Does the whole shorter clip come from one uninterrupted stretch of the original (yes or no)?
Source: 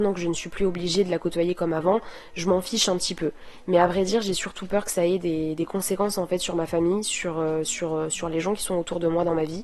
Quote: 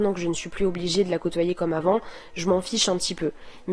yes